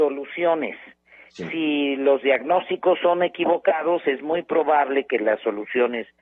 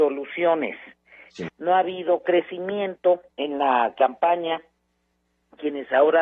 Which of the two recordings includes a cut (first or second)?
second